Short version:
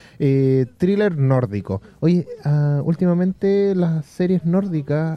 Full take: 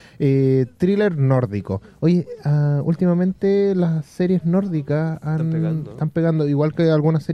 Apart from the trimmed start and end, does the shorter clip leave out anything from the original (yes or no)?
no